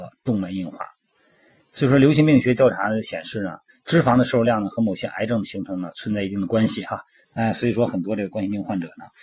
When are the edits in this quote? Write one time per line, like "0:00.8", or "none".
0:07.2